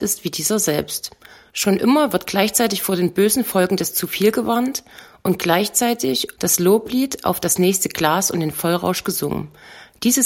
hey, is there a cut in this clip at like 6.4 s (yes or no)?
yes